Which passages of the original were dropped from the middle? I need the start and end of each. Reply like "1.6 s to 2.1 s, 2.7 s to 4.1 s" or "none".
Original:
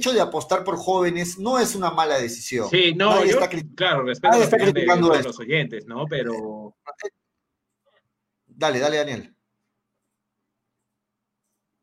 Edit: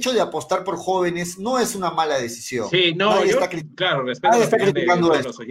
none